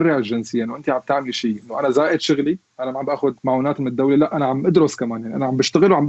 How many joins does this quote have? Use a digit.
1